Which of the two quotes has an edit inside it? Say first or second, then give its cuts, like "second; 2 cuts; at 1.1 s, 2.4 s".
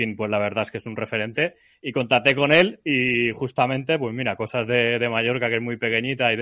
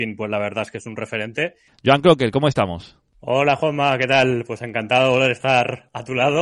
second; 1 cut; at 1.7 s